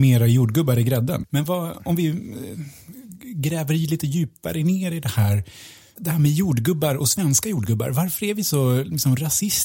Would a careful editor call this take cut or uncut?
cut